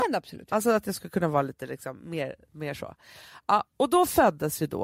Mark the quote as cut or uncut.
uncut